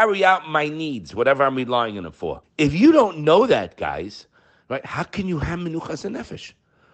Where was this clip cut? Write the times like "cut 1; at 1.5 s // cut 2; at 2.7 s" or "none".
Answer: cut 1; at 2.4 s